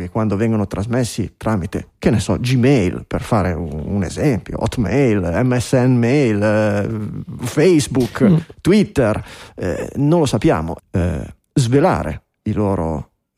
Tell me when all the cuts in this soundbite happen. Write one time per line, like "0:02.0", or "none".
0:10.8